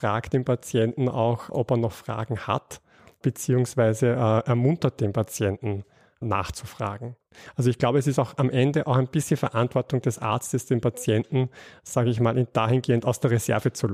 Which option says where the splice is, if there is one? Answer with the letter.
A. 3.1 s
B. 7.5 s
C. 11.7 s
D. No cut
D